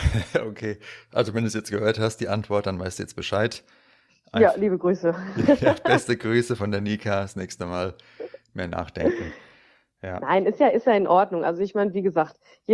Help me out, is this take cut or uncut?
uncut